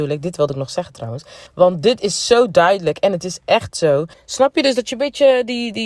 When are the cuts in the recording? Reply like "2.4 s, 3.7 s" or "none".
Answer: 1.5 s, 4.1 s